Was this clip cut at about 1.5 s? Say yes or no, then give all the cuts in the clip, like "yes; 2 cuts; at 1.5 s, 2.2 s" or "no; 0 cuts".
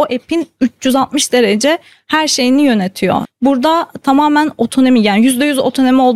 no; 1 cut; at 3.2 s